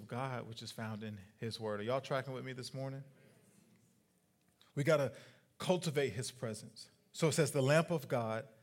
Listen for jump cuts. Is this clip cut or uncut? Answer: uncut